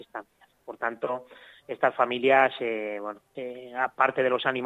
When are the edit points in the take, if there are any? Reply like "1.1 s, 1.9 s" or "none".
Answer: 3.3 s